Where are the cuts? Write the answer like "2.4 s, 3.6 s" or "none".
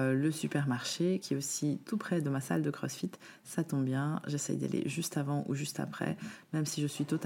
none